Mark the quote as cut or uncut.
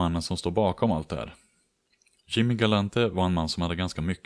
uncut